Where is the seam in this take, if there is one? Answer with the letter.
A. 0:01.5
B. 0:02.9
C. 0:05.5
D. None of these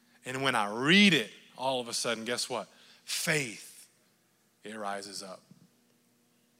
D